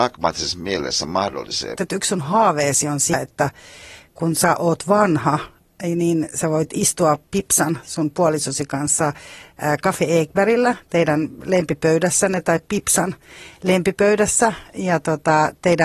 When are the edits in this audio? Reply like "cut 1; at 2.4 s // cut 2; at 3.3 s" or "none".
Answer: cut 1; at 1.8 s